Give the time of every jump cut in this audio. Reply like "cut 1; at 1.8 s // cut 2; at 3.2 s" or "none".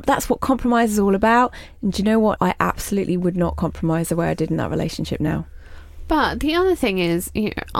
cut 1; at 2.4 s